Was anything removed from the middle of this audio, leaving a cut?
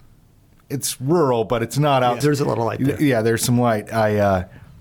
yes; 1 cut; at 2.2 s

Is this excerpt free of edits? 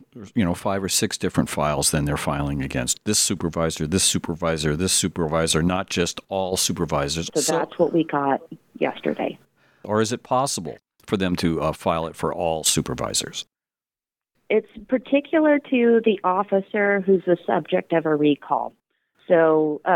no; 2 cuts; at 7.3 s, 9.8 s

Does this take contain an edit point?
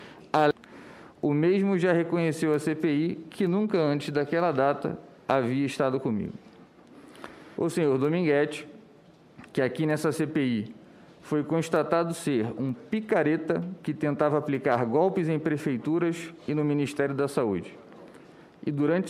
yes; 1 cut; at 7.6 s

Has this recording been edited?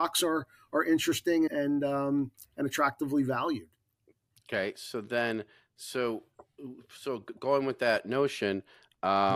yes; 1 cut; at 1.5 s

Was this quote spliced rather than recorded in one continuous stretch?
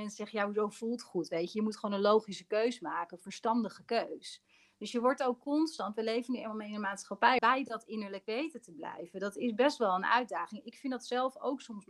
yes; 1 cut; at 7.4 s

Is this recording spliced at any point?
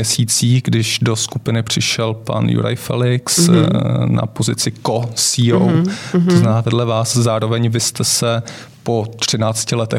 no; 0 cuts

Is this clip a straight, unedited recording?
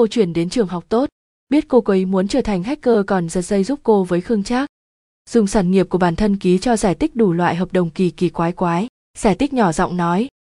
no; 1 cut; at 9.0 s

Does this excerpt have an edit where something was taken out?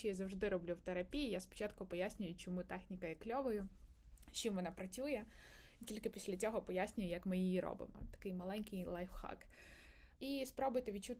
yes; 1 cut; at 10.2 s

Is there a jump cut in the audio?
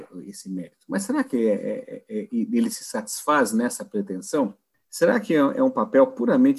yes; 1 cut; at 4.7 s

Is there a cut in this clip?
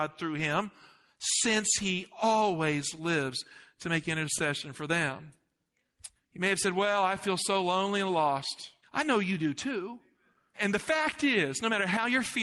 yes; 2 cuts; at 6.2 s, 8.8 s

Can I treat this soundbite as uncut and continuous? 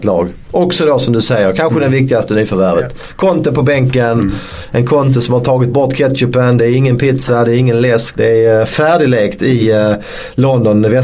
yes; 0 cuts

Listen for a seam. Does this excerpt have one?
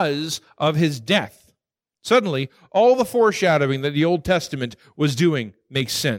no; 0 cuts

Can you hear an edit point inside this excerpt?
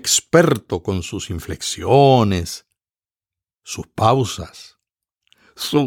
no; 0 cuts

